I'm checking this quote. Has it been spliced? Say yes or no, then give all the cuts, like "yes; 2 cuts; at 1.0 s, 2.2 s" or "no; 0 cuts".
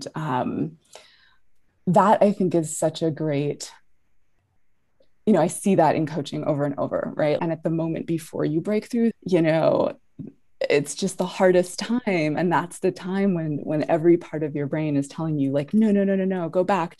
yes; 2 cuts; at 7.4 s, 9.1 s